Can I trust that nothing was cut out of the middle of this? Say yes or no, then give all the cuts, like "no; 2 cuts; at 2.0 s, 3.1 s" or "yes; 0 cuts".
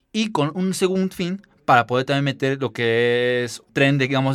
yes; 0 cuts